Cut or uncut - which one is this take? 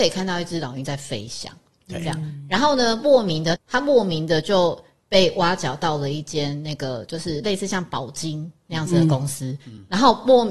cut